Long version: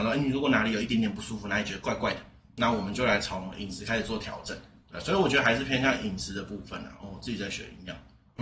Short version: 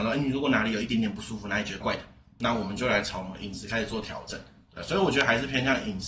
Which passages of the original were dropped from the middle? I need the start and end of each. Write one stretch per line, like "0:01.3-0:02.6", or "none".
0:01.8-0:02.0